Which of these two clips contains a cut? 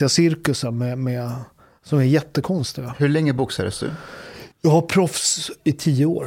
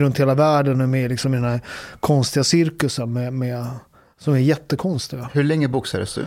first; 1 cut; at 4.5 s

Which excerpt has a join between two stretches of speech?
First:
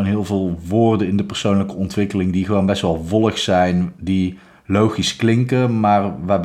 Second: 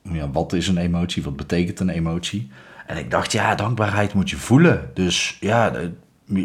second; 1 cut; at 3.6 s

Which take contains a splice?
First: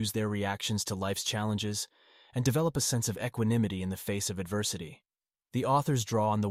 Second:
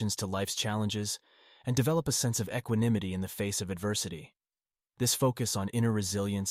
first; 1 cut; at 5.4 s

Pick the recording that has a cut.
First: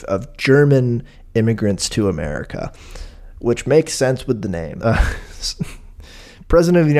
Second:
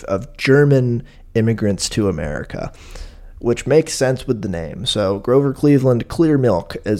first; 1 cut; at 4.8 s

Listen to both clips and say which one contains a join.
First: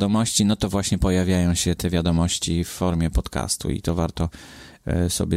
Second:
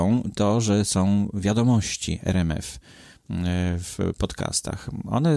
first; 1 cut; at 1.8 s

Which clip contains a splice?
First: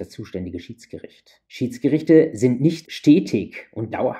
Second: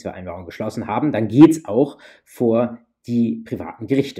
first; 2 cuts; at 1.5 s, 2.8 s

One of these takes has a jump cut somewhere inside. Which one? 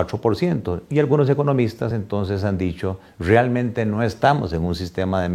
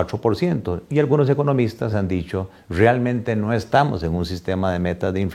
second; 1 cut; at 1.9 s

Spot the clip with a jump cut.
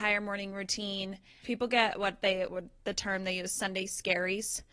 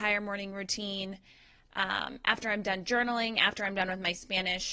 first; 1 cut; at 1.4 s

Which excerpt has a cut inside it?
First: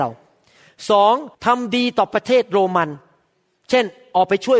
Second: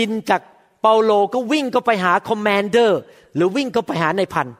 first; 1 cut; at 1.3 s

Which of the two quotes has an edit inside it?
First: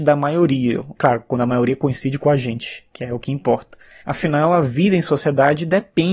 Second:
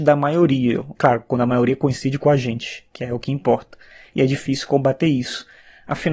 first; 1 cut; at 4.0 s

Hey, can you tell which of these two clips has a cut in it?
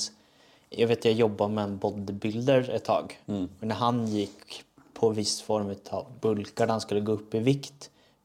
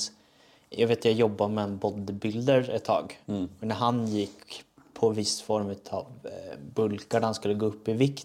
first; 1 cut; at 6.2 s

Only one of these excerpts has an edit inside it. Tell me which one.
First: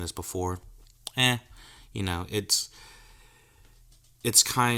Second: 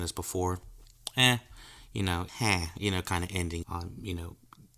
second; 2 cuts; at 2.3 s, 3.6 s

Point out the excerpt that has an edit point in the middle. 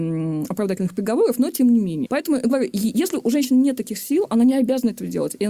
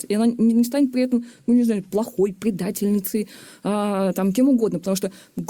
first; 1 cut; at 2.1 s

